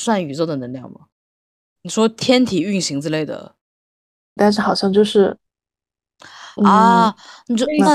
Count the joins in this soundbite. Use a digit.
2